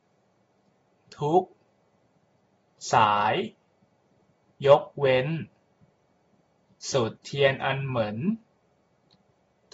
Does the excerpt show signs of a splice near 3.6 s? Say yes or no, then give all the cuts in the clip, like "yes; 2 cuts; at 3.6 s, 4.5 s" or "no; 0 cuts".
no; 1 cut; at 7.2 s